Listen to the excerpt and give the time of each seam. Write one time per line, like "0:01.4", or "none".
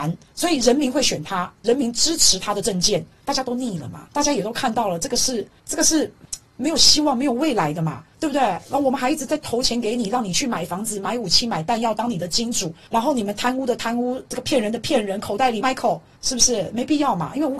0:15.6